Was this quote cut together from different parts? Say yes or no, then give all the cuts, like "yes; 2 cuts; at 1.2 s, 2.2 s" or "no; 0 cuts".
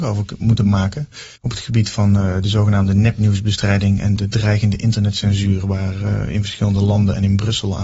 yes; 2 cuts; at 1.4 s, 4.2 s